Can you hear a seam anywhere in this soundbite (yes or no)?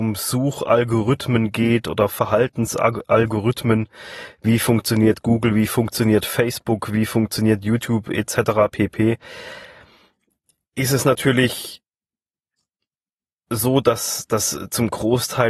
no